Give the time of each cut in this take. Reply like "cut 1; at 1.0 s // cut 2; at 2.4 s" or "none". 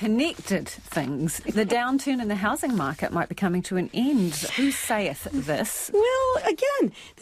cut 1; at 1.4 s // cut 2; at 4.5 s